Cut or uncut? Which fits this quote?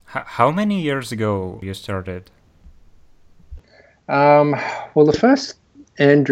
uncut